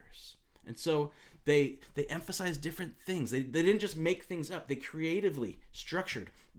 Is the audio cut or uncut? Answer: uncut